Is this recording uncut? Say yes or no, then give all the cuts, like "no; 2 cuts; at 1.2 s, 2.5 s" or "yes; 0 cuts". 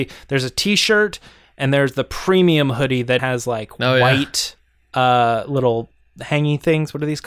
no; 1 cut; at 3.2 s